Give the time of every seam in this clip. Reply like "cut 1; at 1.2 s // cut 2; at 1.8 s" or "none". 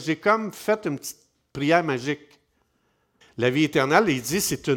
cut 1; at 3.2 s